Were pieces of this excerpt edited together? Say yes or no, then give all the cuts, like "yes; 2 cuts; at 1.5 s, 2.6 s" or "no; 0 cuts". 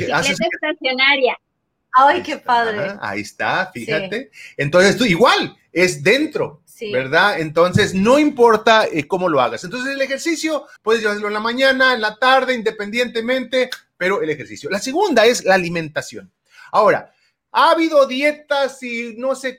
yes; 1 cut; at 10.8 s